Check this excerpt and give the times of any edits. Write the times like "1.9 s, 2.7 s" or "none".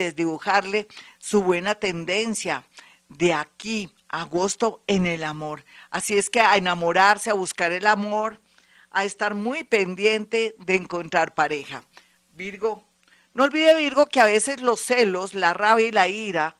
none